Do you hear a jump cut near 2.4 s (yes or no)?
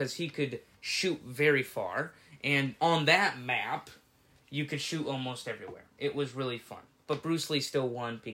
no